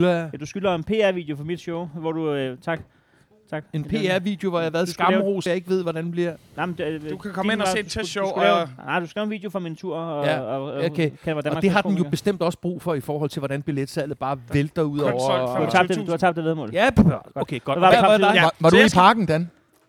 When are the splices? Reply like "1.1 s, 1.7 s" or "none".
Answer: 5.5 s